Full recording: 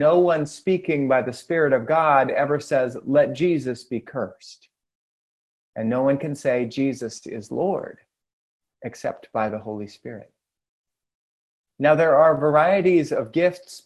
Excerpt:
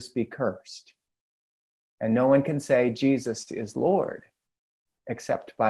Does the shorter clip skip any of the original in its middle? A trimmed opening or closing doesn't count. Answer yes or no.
no